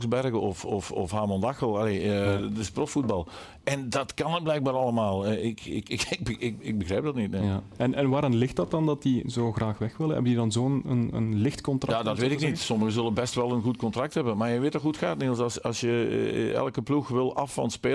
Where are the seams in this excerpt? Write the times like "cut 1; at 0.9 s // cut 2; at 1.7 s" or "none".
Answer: none